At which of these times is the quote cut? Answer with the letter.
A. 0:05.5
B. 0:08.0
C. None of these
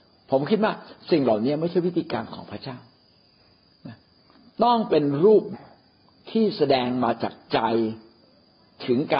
A